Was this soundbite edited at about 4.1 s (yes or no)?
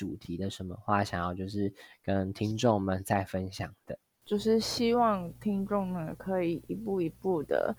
no